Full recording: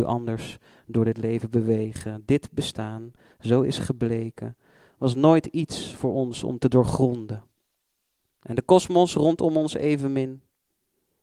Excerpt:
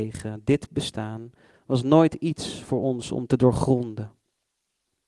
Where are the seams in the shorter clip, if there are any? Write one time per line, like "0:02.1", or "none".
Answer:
0:01.5